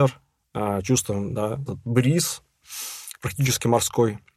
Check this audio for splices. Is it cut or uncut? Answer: cut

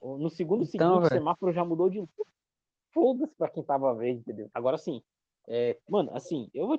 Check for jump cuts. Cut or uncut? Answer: cut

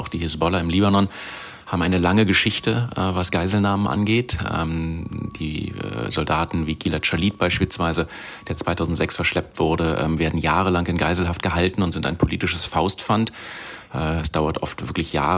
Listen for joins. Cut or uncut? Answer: uncut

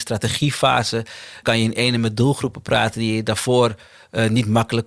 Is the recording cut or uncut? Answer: cut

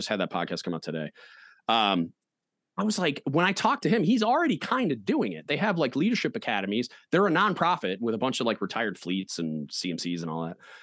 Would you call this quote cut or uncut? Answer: uncut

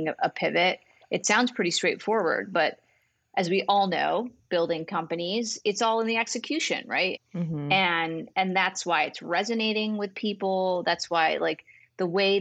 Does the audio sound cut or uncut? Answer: cut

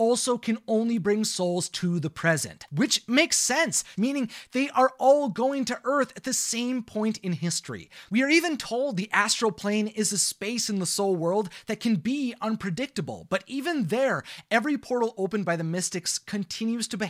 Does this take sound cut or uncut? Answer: cut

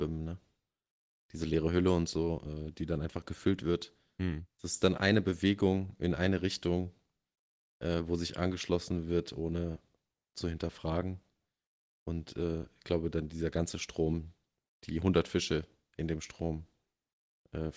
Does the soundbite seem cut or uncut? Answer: uncut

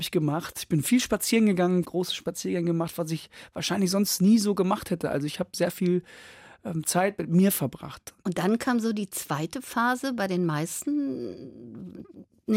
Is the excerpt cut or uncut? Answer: cut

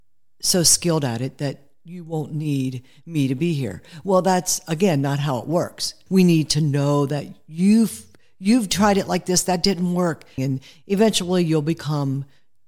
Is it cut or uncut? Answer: cut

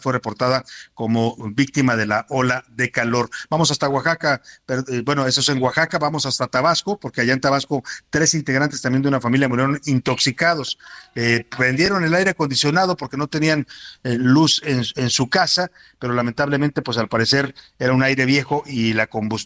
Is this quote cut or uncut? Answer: uncut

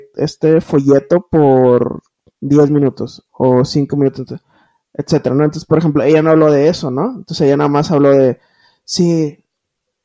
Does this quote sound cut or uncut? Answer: uncut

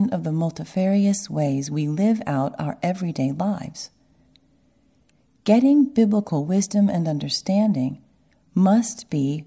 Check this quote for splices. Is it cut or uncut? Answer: uncut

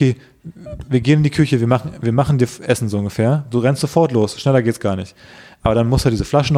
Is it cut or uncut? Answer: uncut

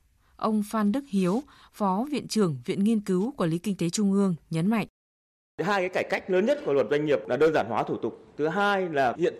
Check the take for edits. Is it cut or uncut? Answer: uncut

